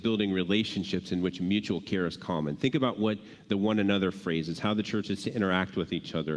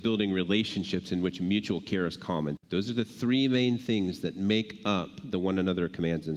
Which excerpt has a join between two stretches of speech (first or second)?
second